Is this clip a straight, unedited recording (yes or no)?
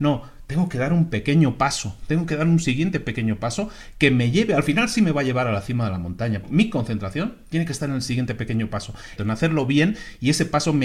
no